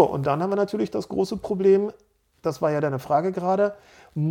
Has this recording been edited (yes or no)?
no